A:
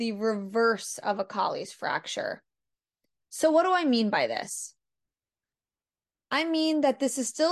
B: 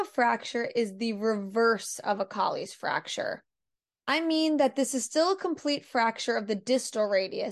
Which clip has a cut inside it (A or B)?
B